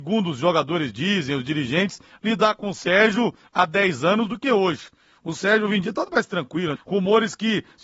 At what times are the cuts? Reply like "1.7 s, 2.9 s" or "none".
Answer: 6.8 s